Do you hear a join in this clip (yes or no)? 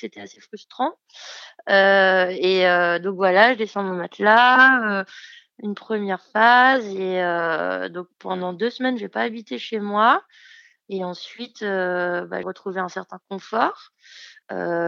yes